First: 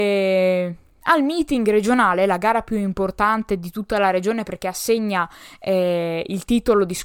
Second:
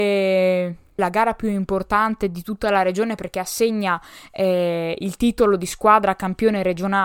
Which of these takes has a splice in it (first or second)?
second